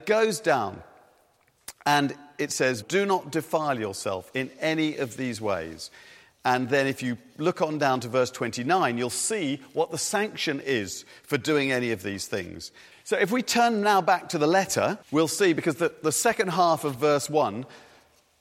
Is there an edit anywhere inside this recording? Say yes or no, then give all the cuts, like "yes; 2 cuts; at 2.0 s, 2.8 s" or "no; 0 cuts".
yes; 3 cuts; at 2.8 s, 12.9 s, 15.0 s